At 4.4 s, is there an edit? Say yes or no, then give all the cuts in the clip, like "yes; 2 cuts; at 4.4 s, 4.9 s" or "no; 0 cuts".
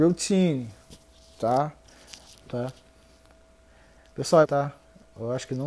yes; 2 cuts; at 2.3 s, 4.4 s